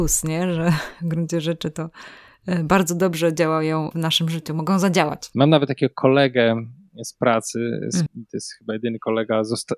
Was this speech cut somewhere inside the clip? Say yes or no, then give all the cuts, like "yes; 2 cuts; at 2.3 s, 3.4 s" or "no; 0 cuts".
yes; 2 cuts; at 5.3 s, 8.1 s